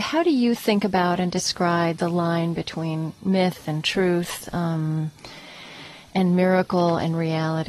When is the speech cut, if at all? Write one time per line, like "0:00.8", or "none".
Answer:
none

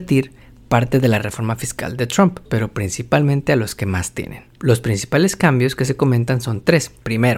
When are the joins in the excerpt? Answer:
0:02.5

